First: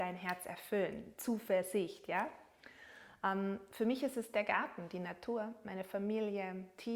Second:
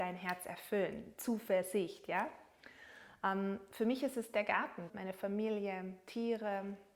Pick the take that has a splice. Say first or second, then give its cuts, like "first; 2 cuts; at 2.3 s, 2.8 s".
second; 1 cut; at 4.9 s